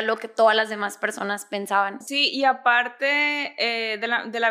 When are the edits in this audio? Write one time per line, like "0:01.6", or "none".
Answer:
0:02.0